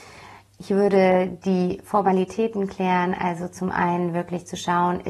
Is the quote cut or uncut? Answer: uncut